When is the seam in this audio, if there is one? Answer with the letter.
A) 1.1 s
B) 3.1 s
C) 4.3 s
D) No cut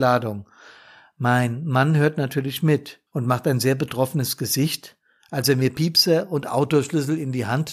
B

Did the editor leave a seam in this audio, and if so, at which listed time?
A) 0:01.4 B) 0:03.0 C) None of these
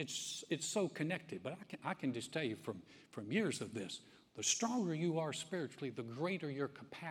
C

